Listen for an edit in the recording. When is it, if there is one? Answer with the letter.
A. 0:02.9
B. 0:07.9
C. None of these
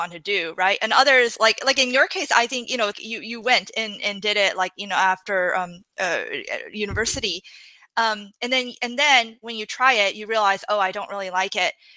A